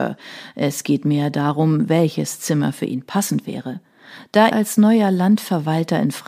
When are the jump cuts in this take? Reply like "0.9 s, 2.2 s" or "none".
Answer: 4.5 s